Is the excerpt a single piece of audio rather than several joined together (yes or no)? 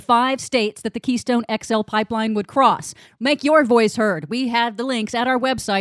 yes